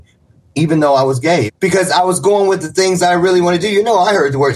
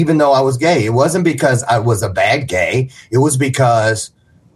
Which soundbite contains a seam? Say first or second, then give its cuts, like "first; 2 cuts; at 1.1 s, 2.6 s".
first; 1 cut; at 1.5 s